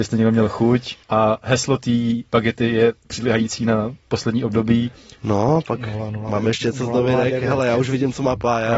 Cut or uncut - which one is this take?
cut